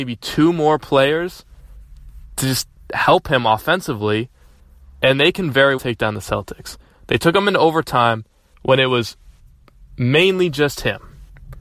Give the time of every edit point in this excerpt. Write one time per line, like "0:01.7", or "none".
0:05.8